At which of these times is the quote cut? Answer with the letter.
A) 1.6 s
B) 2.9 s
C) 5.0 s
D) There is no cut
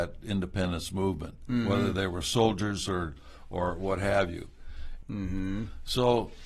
C